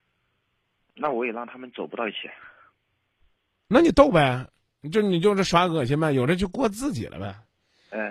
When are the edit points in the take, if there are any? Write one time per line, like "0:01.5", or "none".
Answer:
none